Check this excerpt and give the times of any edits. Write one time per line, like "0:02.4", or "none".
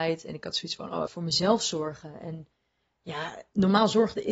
0:01.1